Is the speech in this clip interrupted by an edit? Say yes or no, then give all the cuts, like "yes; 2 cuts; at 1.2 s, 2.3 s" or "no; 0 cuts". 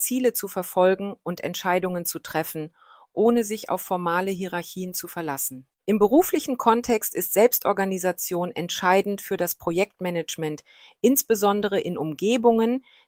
yes; 1 cut; at 5.7 s